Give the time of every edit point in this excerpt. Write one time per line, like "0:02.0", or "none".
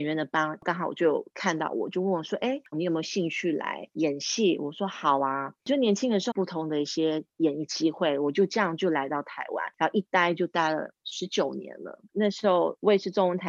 0:02.7
0:06.3
0:12.1